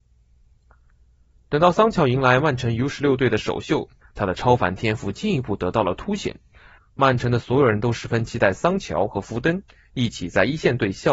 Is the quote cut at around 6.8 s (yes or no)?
yes